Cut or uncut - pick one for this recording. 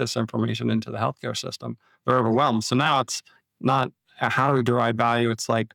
uncut